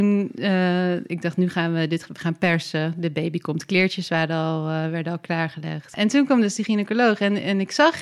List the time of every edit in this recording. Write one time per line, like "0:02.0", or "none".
none